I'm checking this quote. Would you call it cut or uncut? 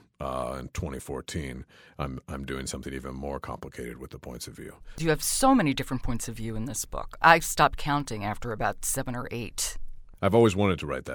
uncut